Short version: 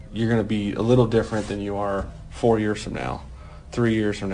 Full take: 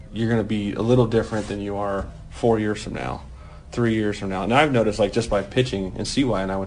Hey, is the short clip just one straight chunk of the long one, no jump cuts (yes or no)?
yes